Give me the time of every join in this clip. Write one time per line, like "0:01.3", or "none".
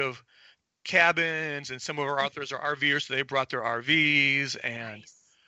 none